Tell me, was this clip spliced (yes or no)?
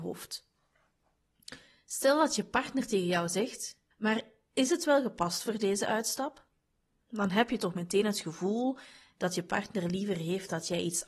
yes